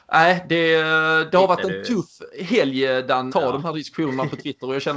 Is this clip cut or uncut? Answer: cut